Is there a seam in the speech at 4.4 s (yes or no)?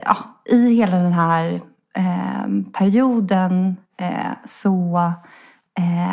no